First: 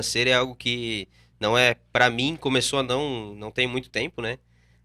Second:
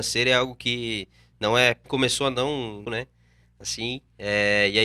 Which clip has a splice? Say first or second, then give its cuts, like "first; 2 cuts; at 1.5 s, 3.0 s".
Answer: second; 2 cuts; at 1.8 s, 2.8 s